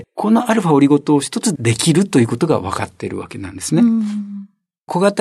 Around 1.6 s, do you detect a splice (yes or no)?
yes